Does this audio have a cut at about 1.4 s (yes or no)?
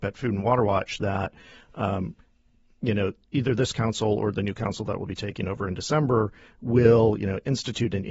no